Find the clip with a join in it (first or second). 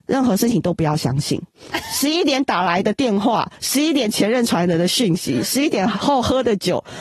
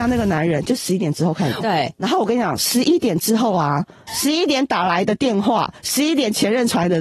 second